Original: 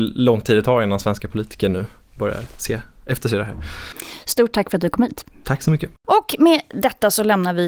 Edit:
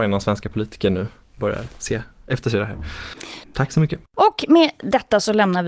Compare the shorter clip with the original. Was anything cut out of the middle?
yes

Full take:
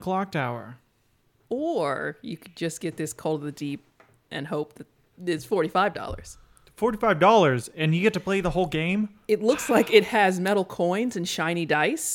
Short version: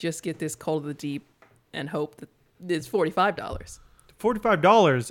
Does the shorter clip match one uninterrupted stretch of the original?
yes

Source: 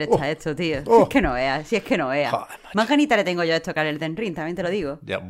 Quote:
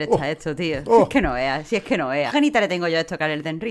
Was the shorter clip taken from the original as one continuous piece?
no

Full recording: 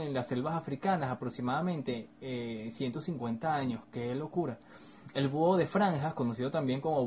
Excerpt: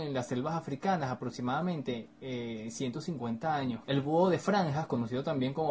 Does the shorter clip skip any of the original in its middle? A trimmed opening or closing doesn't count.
yes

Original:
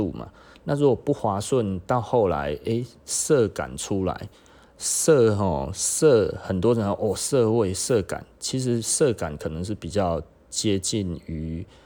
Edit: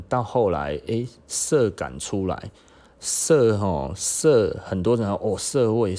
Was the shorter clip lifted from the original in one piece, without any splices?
yes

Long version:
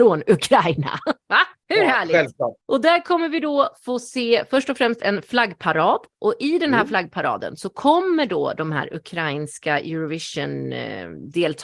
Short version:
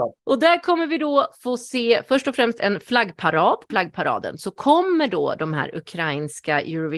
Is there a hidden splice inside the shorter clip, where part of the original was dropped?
yes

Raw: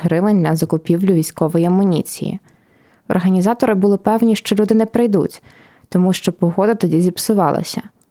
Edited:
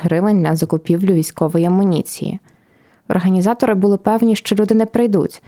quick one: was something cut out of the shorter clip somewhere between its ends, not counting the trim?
no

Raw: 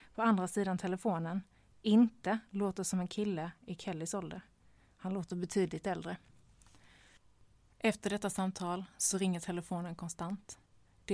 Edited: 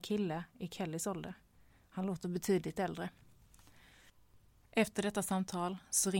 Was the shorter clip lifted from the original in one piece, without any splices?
yes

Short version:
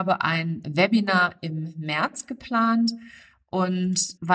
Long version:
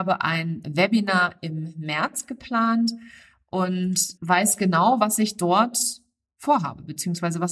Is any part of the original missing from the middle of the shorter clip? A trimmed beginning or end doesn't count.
no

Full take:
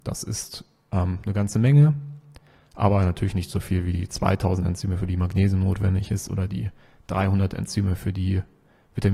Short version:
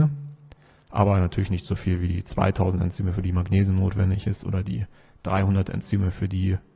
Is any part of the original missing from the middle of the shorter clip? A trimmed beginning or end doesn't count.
no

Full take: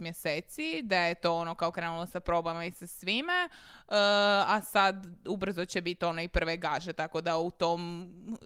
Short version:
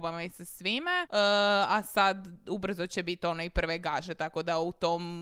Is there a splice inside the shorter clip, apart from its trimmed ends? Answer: yes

